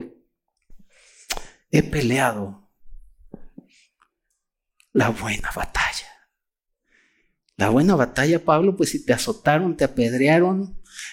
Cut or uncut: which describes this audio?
uncut